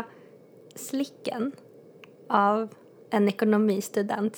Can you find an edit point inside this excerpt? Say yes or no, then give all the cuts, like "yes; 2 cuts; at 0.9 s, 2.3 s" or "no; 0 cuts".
yes; 1 cut; at 3.0 s